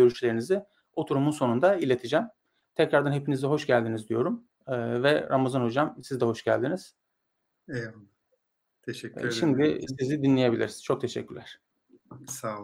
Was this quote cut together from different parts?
no; 0 cuts

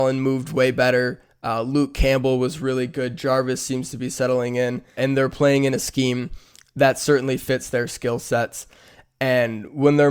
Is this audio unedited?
no; 1 cut; at 5.0 s

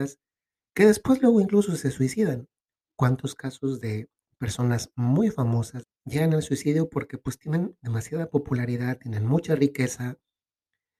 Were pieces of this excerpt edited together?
yes; 1 cut; at 5.8 s

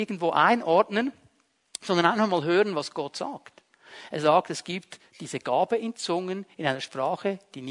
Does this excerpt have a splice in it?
no; 0 cuts

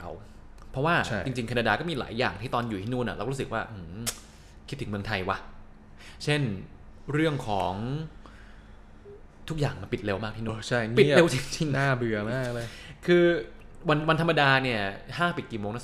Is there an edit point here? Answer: yes; 1 cut; at 10.5 s

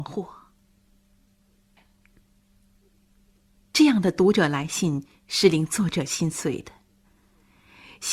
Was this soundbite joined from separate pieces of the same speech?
yes; 1 cut; at 1.8 s

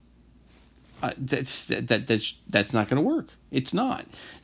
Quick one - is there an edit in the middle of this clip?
no; 0 cuts

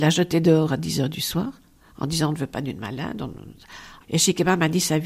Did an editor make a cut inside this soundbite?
yes; 1 cut; at 4.0 s

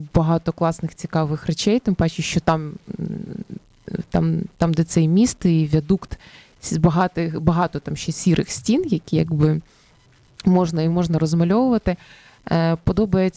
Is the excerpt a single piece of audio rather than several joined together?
yes; 0 cuts

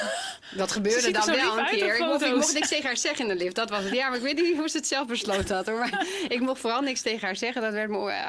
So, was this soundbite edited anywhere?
no; 0 cuts

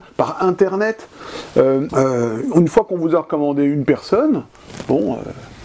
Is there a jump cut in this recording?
yes; 1 cut; at 1.9 s

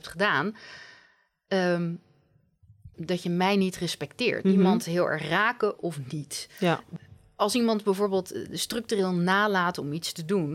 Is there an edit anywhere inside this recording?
yes; 2 cuts; at 2.9 s, 4.4 s

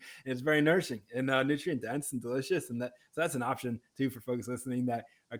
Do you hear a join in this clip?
no; 0 cuts

